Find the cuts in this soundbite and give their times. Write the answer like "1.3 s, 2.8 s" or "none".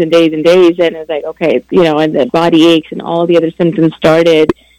none